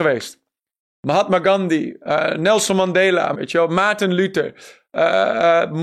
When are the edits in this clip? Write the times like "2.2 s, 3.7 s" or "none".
3.3 s